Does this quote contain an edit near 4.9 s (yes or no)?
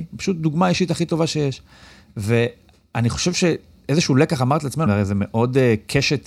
yes